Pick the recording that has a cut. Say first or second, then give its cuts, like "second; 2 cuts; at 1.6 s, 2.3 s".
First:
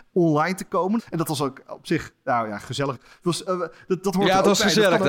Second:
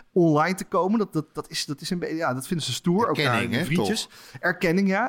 first; 2 cuts; at 1.0 s, 2.9 s